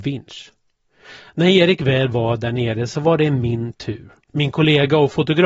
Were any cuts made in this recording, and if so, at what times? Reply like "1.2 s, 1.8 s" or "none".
4.3 s